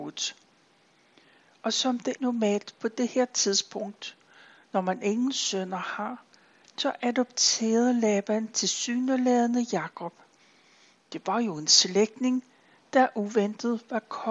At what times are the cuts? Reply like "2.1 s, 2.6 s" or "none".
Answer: 2.2 s